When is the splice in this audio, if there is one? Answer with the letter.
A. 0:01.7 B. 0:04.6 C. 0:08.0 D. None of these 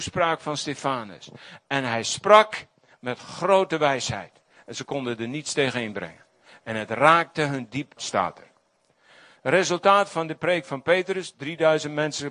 C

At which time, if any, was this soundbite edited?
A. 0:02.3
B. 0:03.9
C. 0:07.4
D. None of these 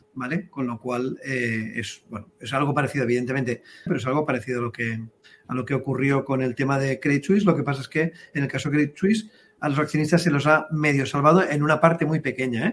B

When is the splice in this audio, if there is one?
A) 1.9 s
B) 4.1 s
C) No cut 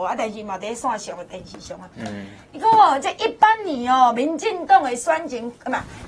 C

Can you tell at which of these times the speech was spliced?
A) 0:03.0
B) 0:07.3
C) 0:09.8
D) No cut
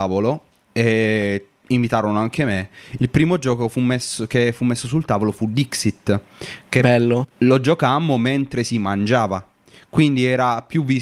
D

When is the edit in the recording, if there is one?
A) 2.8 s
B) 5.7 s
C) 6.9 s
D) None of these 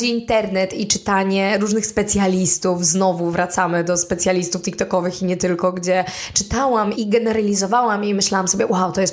C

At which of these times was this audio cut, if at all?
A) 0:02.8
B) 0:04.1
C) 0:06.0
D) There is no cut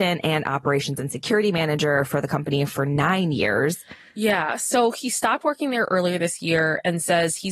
D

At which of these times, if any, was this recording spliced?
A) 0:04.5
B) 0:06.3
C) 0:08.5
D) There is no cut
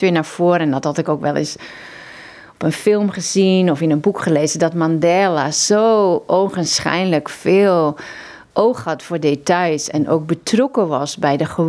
D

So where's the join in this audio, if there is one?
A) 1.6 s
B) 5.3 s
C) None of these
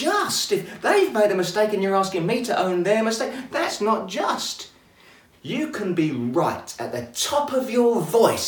B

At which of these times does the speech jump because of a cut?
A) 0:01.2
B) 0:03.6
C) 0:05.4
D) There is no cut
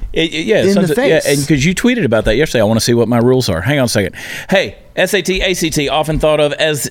D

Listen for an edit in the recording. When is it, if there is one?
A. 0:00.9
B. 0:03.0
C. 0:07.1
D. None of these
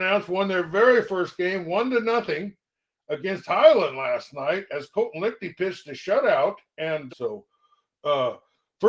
C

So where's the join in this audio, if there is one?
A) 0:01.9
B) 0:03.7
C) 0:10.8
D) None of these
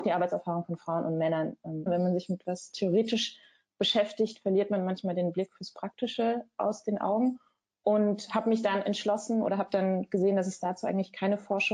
A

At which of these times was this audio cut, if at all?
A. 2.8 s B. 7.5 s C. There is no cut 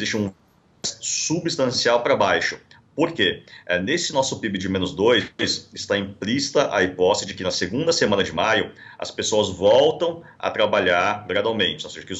C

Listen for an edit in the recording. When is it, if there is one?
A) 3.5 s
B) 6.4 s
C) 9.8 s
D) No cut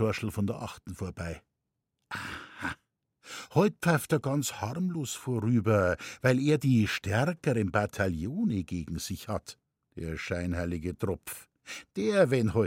C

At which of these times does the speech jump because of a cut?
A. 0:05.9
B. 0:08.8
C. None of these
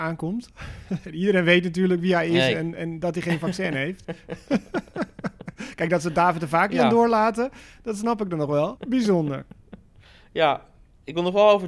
B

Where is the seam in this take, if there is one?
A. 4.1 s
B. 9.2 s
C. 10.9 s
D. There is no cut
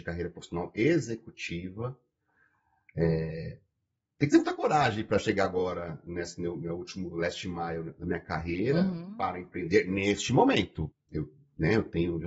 C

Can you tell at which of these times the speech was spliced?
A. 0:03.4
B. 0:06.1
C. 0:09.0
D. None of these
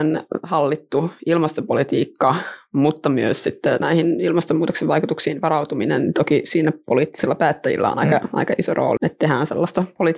C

